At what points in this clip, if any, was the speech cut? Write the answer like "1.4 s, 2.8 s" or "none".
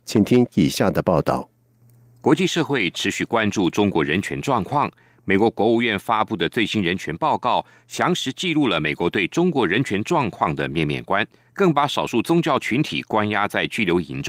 11.5 s